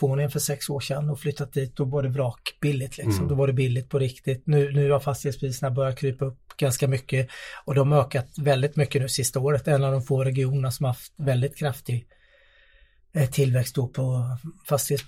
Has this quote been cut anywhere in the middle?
no; 0 cuts

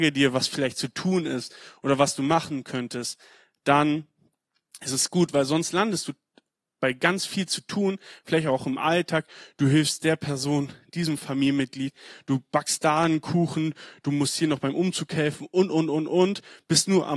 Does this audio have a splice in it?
no; 0 cuts

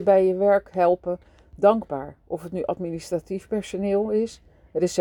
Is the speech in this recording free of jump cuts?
yes; 0 cuts

